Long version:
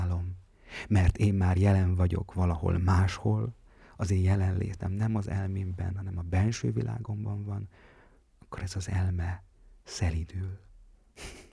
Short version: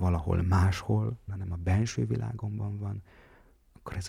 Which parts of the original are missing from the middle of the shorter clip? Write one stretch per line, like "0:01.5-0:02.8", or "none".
0:03.6-0:05.9